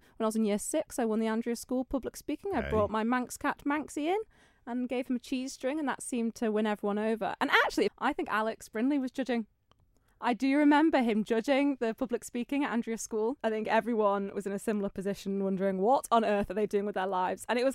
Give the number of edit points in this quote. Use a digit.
2